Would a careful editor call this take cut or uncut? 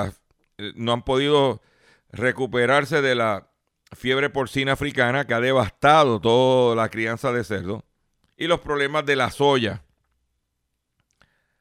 cut